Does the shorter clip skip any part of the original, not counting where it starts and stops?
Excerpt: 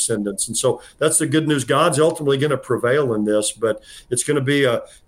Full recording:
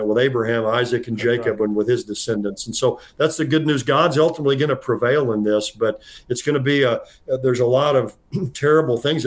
no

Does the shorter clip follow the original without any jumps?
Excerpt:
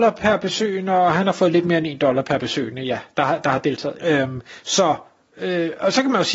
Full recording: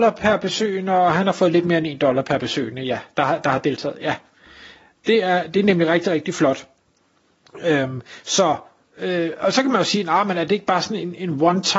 no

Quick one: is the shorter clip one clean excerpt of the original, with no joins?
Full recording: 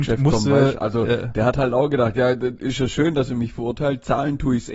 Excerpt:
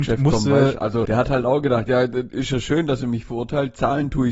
no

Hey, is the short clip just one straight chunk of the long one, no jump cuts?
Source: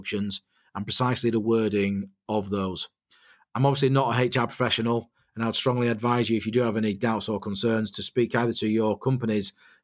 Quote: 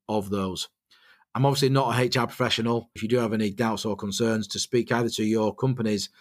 no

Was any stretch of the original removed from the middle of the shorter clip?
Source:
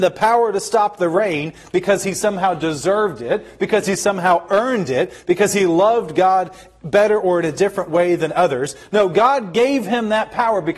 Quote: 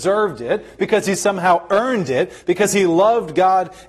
no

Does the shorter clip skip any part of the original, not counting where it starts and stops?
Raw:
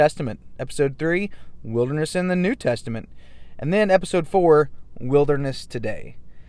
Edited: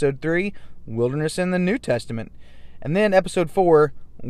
no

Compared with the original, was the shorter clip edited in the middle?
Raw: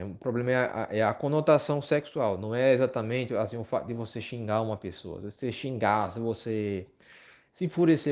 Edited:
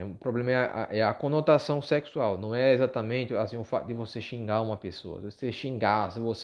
no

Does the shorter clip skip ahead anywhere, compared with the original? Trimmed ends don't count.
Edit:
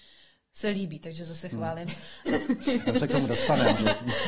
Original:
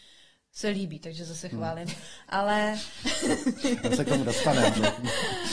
yes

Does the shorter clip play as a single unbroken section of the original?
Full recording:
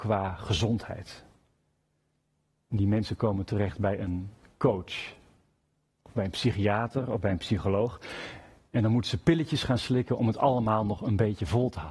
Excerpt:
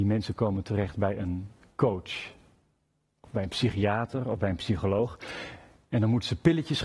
yes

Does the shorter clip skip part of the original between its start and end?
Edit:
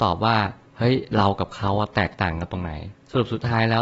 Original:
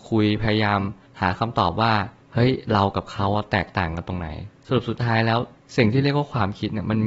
no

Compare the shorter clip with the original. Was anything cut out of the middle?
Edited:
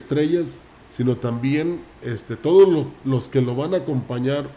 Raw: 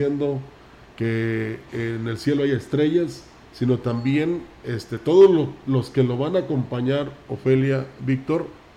no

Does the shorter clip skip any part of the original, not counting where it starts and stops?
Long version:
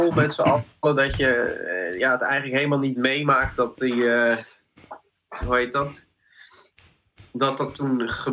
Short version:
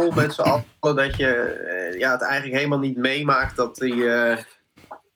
no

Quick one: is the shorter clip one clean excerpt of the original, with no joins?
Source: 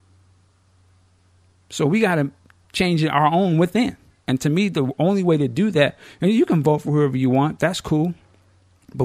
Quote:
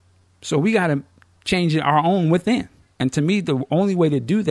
yes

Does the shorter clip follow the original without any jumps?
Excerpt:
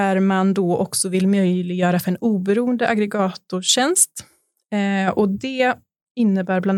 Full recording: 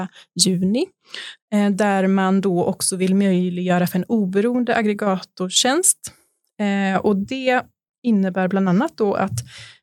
yes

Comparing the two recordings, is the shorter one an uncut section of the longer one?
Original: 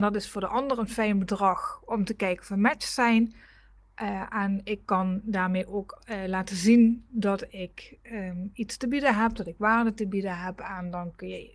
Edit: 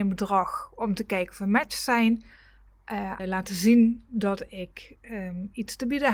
no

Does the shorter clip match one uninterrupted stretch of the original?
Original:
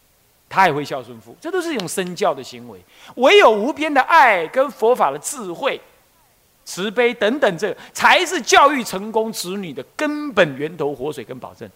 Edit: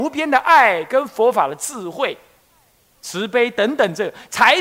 yes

